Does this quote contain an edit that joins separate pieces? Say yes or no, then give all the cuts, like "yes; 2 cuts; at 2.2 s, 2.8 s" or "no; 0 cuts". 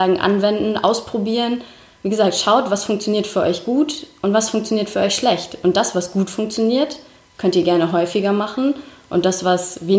no; 0 cuts